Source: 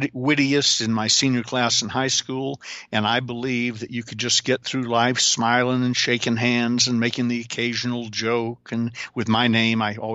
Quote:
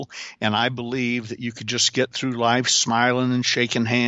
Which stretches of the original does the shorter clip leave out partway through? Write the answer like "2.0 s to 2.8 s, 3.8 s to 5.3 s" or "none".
none